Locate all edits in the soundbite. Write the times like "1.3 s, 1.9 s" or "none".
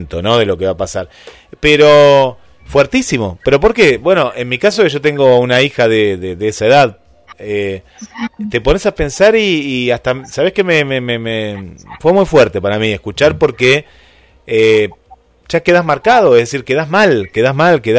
none